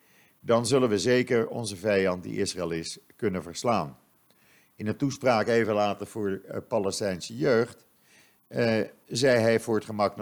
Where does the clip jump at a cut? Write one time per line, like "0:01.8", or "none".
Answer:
none